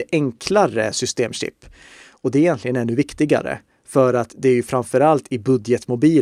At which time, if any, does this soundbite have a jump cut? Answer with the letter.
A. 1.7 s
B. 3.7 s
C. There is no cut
C